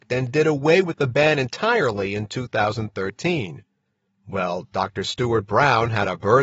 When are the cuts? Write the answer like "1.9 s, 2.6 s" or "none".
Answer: 4.1 s

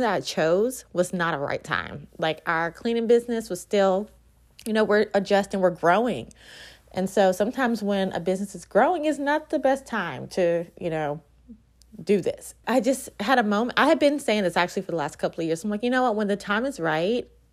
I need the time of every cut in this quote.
12.6 s

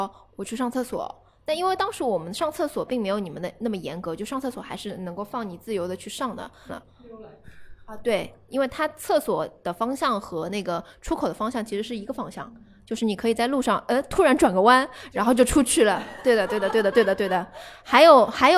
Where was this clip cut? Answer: 6.7 s

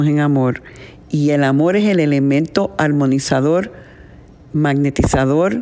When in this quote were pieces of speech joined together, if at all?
none

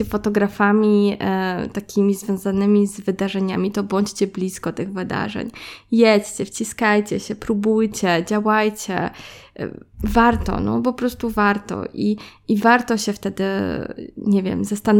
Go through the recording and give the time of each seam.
none

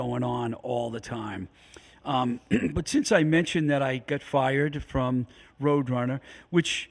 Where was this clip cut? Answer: none

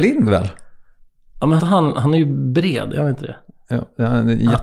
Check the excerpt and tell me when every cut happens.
1.6 s

